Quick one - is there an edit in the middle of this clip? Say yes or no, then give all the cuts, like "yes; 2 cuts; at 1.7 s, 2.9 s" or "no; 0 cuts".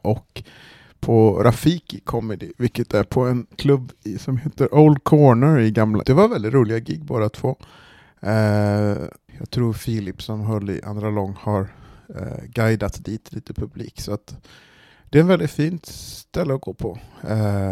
yes; 3 cuts; at 3.5 s, 6.0 s, 9.3 s